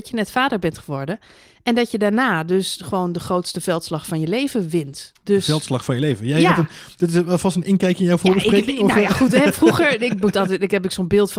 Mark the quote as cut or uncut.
uncut